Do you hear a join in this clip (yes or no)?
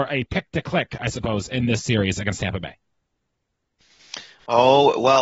no